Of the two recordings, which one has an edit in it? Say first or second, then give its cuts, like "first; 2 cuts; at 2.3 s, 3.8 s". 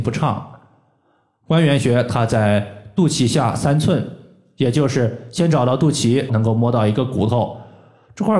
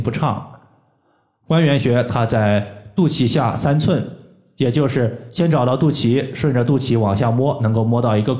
first; 1 cut; at 6.3 s